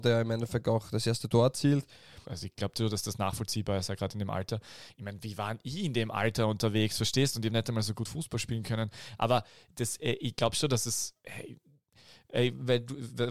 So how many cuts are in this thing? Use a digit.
1